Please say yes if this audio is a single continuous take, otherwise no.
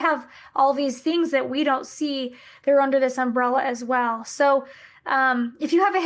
yes